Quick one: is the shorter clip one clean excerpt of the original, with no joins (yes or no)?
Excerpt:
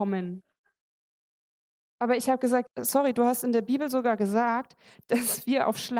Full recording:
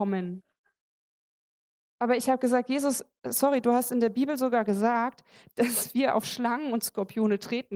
no